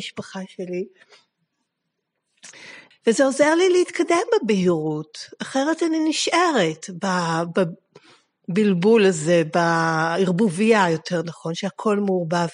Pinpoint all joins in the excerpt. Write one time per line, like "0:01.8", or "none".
0:02.9